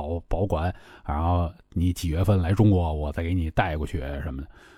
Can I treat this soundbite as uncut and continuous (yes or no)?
yes